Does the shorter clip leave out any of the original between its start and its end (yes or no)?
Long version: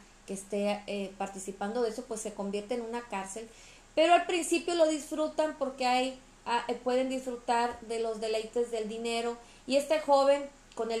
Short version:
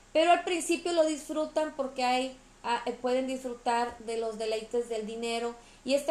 no